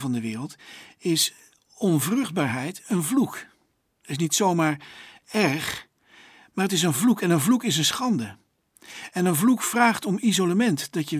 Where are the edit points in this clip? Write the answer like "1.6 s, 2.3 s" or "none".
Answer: none